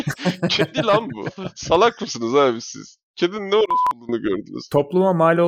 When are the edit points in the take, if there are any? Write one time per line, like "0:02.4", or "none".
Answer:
none